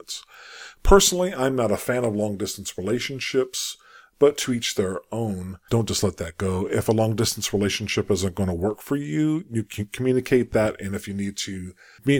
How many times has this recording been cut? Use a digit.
1